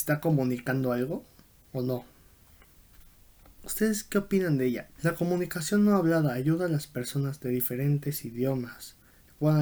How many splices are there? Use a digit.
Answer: 2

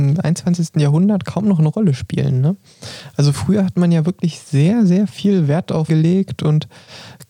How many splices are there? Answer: 1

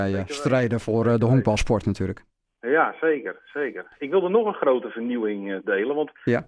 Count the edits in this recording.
0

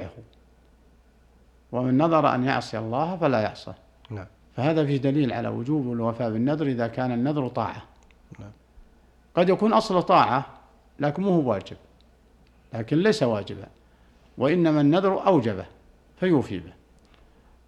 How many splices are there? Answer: 0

